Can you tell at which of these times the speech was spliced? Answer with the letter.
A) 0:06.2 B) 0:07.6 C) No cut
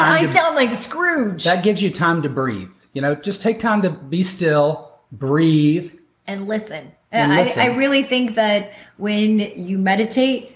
A